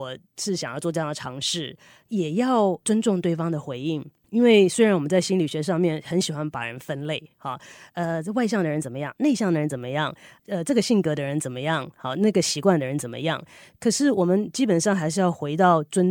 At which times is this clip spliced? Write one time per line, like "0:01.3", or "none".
none